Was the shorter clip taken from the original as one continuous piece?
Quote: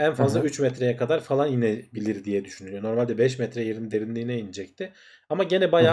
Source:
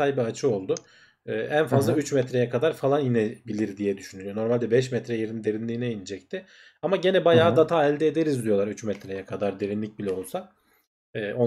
yes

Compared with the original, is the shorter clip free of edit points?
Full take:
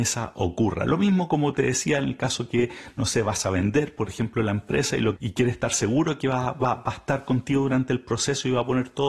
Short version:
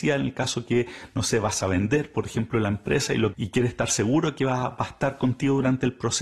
no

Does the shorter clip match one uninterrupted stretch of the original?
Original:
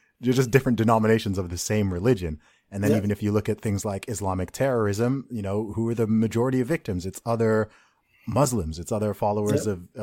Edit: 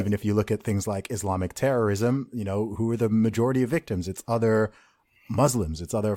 yes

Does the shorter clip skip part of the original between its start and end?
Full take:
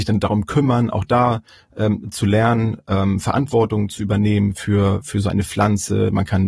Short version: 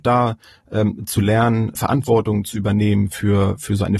yes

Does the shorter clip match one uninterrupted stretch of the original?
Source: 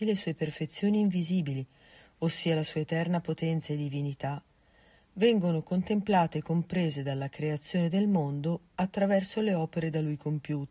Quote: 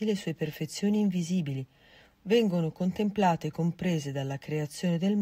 no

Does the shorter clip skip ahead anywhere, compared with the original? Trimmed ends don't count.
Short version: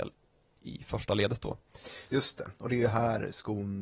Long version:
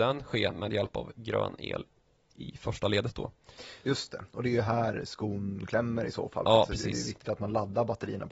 no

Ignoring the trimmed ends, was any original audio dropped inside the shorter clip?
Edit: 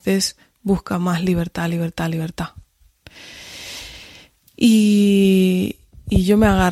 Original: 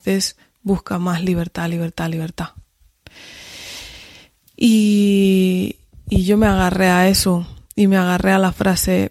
no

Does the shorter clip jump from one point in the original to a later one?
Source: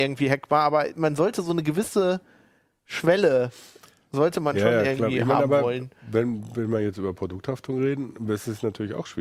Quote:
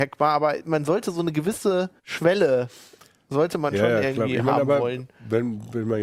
yes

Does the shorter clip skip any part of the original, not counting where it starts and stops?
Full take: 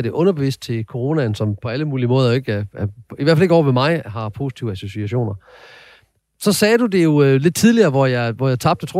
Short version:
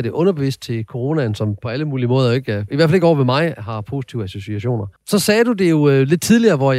yes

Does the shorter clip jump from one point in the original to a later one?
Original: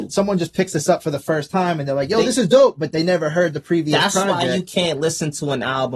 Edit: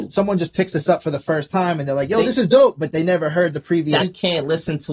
yes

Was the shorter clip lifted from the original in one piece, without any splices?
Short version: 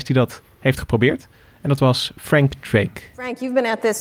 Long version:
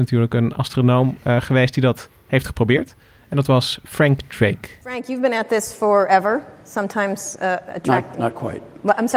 yes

